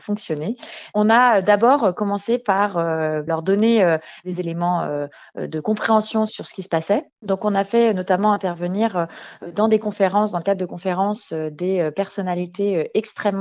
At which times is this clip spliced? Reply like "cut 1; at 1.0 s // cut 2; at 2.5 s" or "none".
cut 1; at 6.3 s